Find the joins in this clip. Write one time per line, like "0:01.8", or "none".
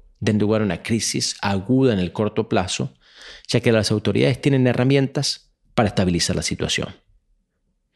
none